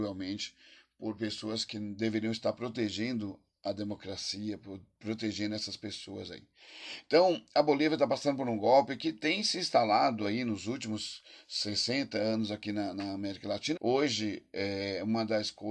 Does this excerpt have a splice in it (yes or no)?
yes